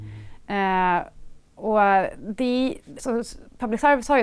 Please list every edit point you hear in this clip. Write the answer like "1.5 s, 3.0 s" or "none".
3.0 s